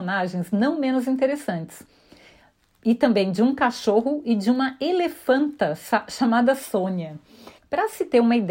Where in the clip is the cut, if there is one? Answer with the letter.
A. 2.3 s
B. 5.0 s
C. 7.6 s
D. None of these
C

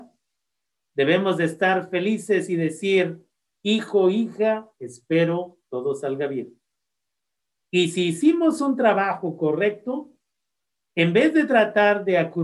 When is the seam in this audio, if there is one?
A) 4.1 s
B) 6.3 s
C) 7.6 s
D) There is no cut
C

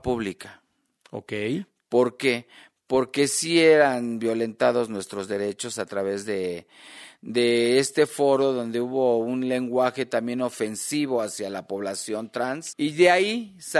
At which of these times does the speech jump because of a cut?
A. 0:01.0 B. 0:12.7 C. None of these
B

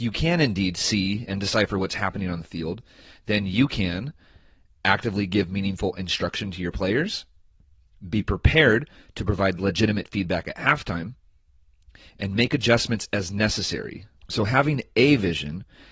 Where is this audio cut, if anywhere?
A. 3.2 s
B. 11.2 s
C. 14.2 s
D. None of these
C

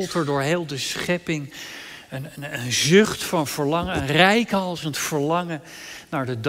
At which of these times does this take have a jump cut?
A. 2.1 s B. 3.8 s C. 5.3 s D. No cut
D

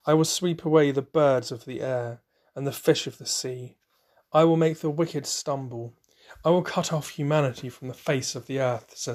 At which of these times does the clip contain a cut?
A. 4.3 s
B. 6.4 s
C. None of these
C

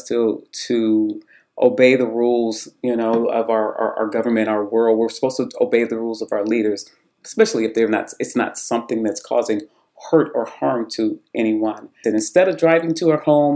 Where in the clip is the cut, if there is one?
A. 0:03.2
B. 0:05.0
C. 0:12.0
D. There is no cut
C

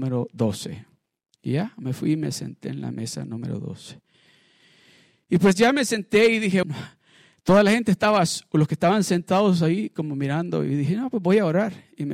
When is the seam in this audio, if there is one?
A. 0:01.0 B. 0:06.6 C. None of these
B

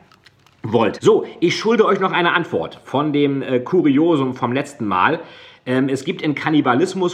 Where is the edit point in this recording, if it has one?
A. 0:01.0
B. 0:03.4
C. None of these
A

